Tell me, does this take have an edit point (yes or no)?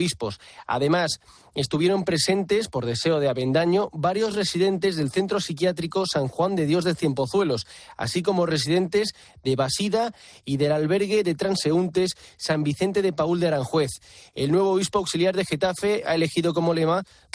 no